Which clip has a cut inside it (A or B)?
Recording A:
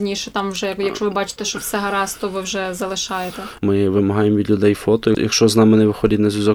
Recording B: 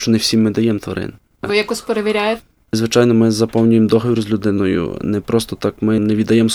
A